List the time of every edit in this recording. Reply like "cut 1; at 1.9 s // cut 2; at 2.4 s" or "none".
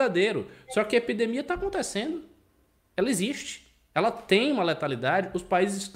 none